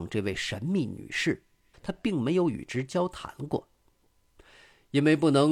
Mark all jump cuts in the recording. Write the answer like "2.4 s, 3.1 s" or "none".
1.7 s